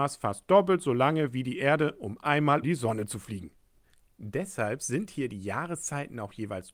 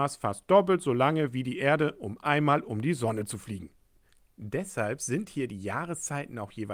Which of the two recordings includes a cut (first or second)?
first